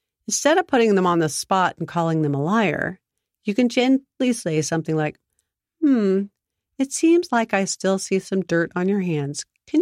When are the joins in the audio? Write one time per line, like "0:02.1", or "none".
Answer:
none